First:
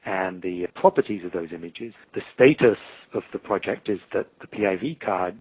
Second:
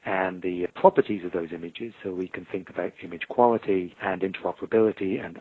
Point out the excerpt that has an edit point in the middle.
first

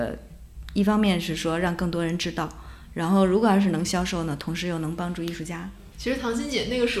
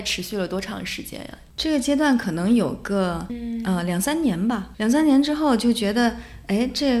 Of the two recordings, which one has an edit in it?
second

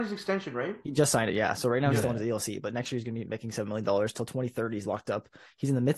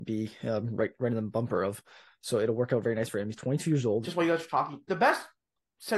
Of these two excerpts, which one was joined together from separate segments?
second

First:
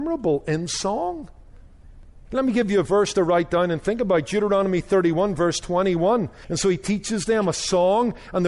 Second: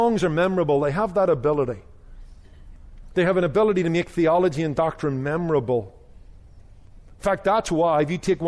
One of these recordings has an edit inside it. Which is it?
first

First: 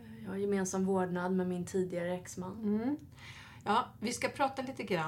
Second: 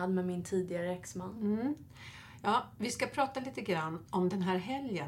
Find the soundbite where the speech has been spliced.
second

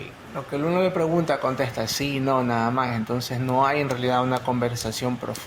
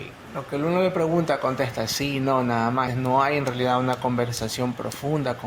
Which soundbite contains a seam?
second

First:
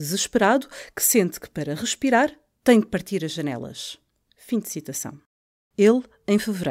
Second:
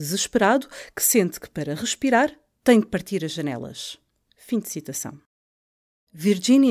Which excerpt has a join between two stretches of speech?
first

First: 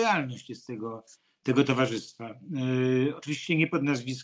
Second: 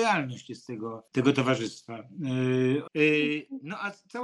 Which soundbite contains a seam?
second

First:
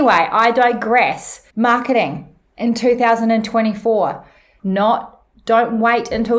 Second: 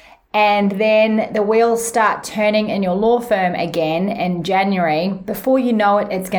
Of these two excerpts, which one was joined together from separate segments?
first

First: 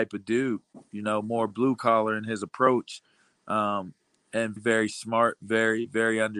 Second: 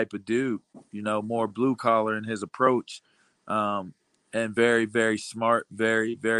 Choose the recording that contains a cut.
first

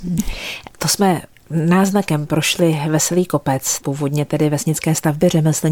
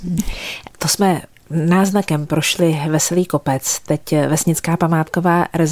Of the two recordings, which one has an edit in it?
first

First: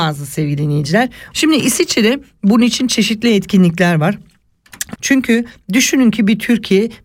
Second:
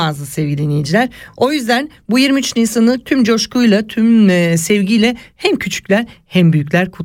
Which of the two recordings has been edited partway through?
first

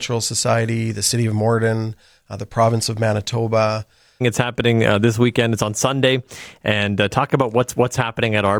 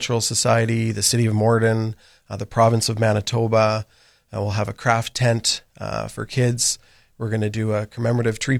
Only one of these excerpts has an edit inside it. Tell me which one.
first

